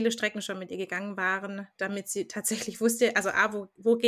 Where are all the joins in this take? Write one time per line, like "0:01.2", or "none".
none